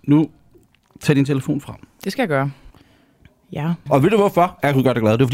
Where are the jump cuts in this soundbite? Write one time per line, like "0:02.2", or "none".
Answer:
0:03.9